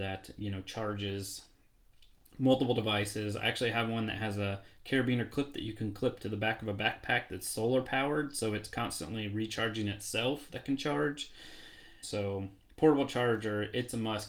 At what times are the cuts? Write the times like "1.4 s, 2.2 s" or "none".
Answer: 12.0 s